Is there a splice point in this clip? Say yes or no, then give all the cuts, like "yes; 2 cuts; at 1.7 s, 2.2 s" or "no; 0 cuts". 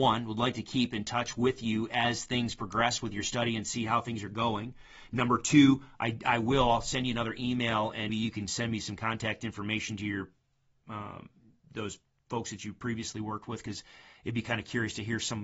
yes; 1 cut; at 8.1 s